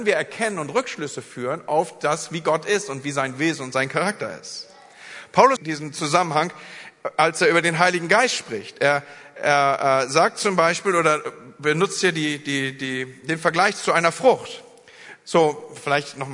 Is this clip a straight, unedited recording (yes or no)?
no